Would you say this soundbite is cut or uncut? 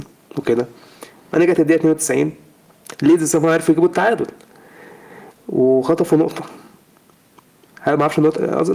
uncut